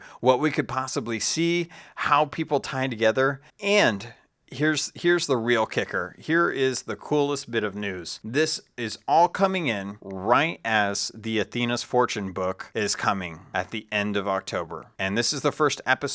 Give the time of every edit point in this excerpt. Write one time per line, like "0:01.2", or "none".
0:03.5